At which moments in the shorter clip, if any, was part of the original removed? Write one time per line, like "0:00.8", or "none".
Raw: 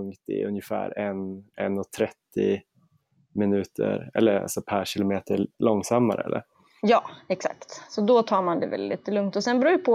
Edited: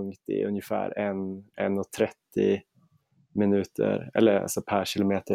none